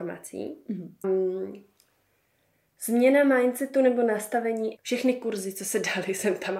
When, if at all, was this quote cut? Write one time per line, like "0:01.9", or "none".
0:01.0
0:04.8